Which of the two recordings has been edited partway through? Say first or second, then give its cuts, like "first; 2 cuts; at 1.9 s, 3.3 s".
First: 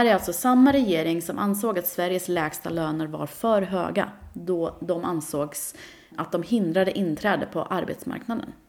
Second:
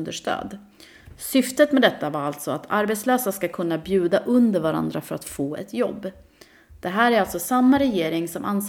first; 1 cut; at 6.1 s